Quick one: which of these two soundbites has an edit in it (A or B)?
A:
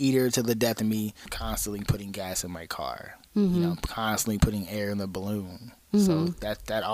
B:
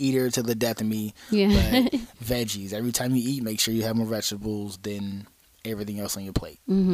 A